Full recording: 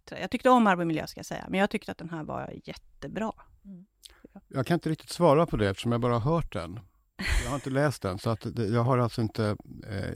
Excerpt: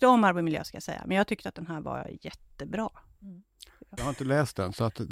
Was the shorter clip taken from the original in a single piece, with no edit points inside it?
no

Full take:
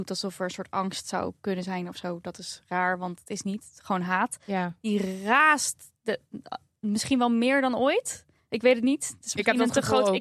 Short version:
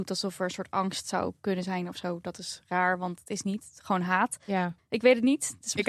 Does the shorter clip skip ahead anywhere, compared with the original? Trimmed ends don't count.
yes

